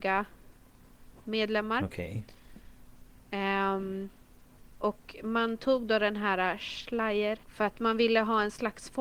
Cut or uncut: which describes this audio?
cut